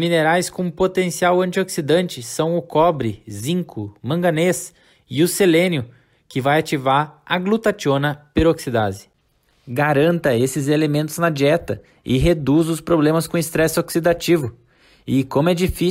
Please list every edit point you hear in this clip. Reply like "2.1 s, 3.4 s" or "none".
4.9 s

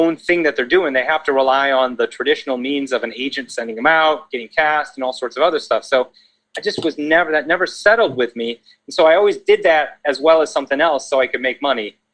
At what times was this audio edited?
none

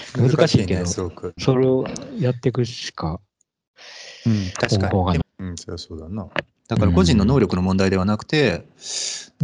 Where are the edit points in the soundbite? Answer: 1.4 s, 5.2 s, 6.6 s

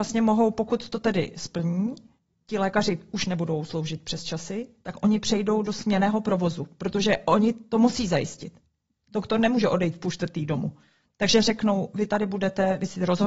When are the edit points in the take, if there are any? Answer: none

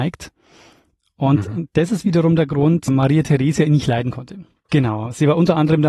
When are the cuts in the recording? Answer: 2.9 s, 4.7 s

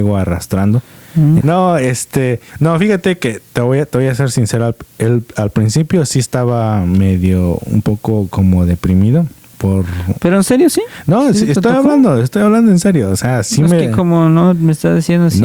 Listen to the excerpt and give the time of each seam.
1.4 s

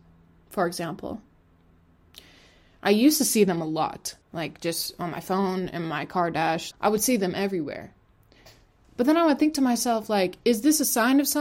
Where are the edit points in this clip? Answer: 4.2 s, 6.7 s

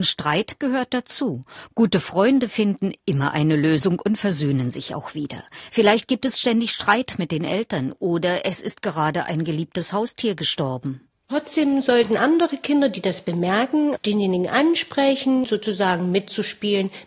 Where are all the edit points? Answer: 5.7 s, 14.0 s, 15.4 s

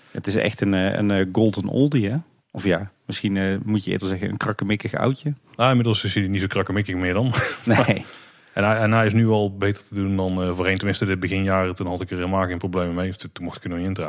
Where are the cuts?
none

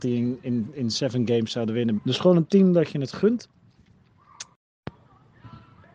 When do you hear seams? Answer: 2.0 s

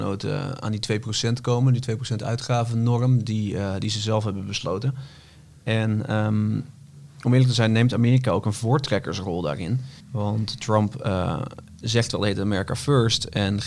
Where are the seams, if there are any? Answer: 10.0 s

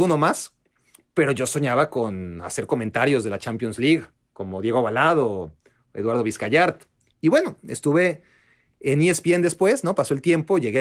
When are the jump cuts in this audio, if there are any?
none

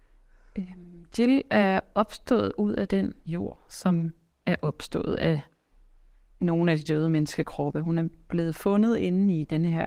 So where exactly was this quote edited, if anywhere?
3.2 s

